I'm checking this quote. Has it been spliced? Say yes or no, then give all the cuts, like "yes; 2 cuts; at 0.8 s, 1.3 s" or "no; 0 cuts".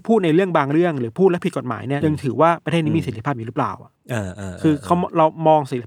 yes; 2 cuts; at 2.0 s, 4.0 s